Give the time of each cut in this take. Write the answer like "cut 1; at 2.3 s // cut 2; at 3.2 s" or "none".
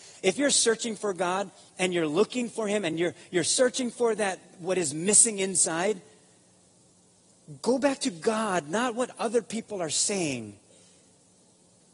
none